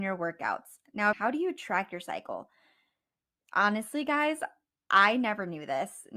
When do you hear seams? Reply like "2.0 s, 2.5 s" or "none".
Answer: 1.1 s

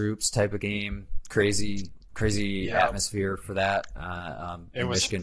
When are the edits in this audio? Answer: none

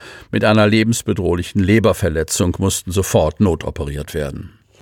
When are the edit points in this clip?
none

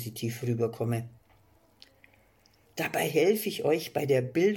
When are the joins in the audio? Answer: none

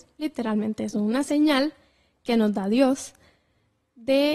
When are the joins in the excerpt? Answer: none

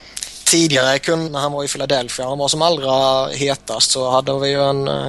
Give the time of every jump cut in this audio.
1.3 s

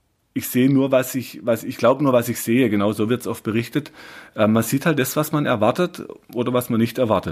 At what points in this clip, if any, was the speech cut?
none

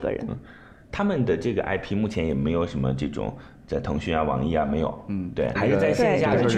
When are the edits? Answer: 5.6 s

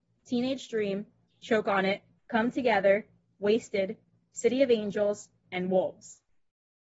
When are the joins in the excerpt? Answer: 2.2 s, 5.4 s

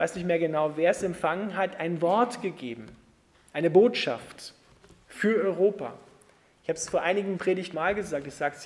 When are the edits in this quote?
7.7 s

